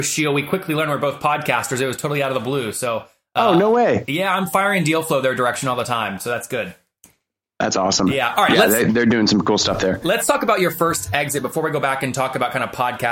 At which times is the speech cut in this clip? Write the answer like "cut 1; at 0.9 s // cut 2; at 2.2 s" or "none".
none